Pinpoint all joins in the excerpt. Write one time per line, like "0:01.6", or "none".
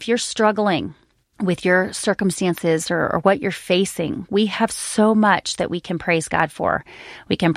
none